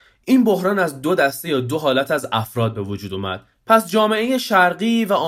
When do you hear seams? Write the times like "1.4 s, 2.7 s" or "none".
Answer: 3.5 s